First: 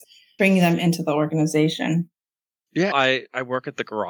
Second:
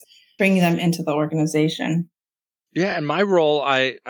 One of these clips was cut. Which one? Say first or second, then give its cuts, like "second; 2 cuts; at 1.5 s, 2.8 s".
first; 1 cut; at 2.9 s